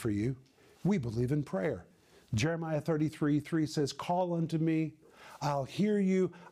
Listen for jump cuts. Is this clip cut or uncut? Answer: uncut